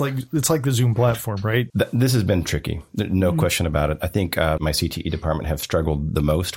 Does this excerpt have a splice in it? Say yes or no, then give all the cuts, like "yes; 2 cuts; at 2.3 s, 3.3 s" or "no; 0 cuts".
yes; 2 cuts; at 1.7 s, 4.6 s